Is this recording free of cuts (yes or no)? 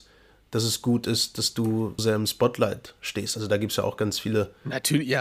no